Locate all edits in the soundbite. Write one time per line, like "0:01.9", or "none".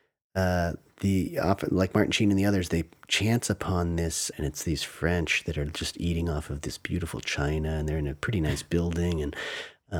0:04.3